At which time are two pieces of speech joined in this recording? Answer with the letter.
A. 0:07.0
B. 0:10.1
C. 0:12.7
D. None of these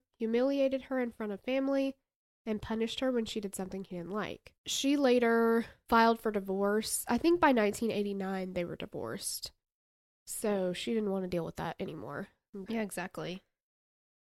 C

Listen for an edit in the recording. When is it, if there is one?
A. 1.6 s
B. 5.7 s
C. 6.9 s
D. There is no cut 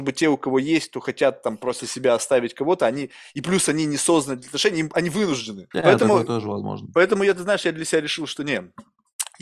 B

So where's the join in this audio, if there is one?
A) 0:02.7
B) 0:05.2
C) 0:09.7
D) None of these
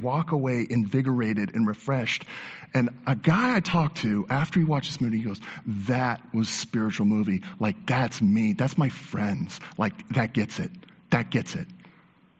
D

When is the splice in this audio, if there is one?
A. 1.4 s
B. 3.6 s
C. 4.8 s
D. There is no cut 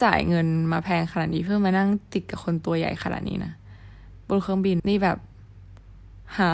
C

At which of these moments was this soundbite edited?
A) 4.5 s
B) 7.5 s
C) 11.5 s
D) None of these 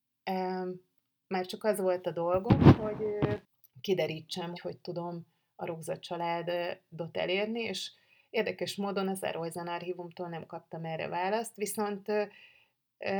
A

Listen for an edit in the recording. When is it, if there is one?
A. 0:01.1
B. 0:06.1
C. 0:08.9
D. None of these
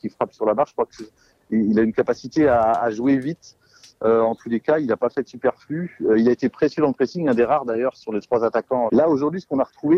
C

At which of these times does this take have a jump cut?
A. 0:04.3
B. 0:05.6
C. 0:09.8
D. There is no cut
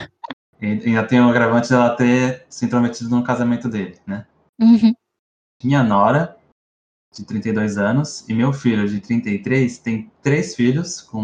B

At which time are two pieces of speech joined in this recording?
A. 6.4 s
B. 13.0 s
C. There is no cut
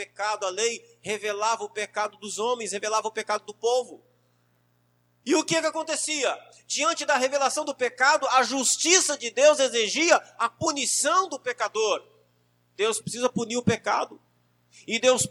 B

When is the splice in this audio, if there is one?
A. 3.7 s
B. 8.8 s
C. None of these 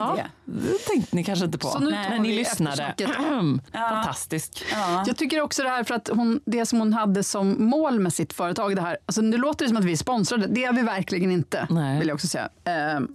A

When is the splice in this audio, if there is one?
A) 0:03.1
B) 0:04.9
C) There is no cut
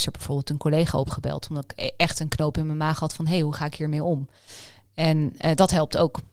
C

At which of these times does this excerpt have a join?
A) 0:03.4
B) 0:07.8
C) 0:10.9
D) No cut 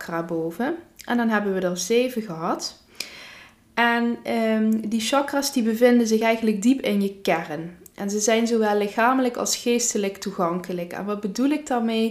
D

